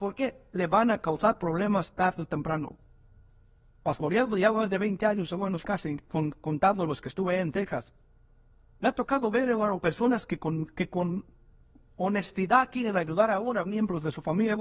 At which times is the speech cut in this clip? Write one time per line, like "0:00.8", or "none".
0:06.1